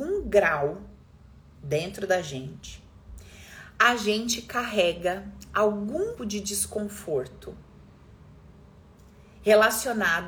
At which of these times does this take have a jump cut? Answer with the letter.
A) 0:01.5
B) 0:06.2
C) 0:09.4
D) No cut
B